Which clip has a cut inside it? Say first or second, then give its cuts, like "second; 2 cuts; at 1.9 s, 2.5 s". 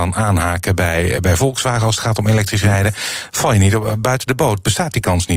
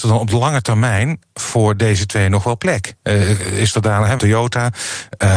second; 1 cut; at 4.2 s